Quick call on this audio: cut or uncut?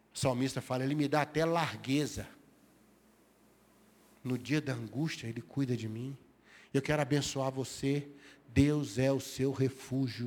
uncut